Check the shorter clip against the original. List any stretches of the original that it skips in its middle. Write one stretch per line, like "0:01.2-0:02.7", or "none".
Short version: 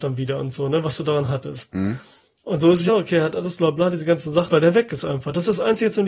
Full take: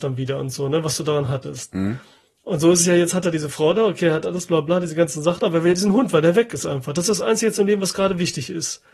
0:02.9-0:03.8
0:05.4-0:06.1